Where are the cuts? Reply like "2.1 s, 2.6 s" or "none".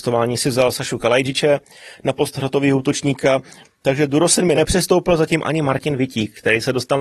4.5 s